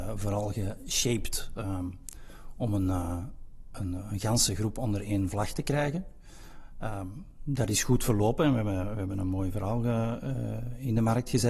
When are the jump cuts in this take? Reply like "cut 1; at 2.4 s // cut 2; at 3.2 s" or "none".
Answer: none